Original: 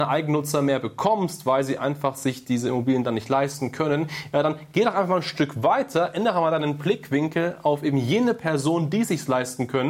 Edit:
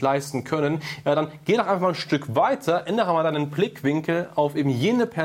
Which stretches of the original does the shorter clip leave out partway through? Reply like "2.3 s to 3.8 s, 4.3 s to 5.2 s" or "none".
none